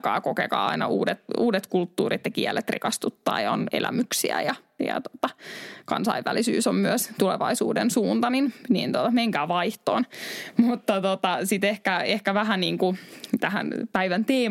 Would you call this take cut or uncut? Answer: uncut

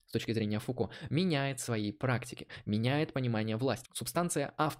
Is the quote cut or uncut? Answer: cut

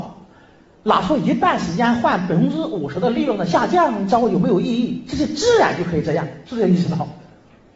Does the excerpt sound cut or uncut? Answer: uncut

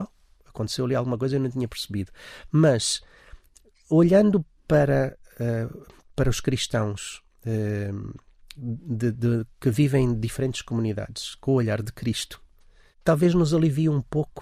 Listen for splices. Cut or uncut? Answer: uncut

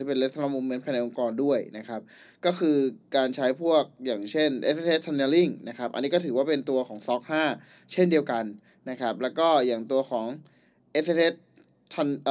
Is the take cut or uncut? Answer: uncut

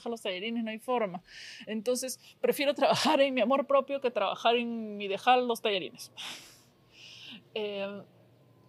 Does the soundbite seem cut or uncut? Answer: uncut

